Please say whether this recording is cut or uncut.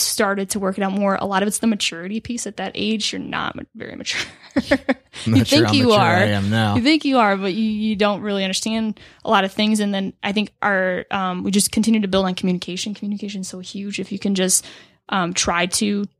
uncut